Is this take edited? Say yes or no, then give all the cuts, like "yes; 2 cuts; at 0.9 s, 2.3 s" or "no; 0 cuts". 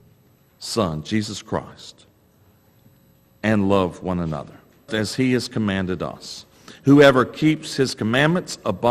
yes; 1 cut; at 4.9 s